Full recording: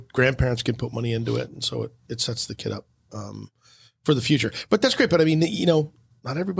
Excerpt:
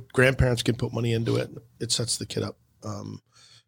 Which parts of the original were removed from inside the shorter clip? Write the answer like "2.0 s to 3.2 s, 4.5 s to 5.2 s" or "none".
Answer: 1.6 s to 1.9 s